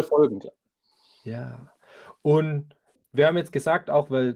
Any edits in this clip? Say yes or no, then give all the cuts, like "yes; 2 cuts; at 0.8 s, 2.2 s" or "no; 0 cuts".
no; 0 cuts